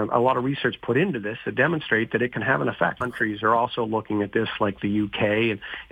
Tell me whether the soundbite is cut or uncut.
cut